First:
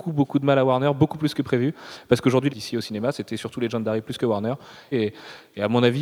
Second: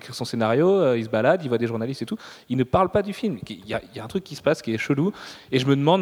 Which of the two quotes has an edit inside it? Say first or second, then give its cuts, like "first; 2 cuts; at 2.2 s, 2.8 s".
first; 2 cuts; at 2.5 s, 4.9 s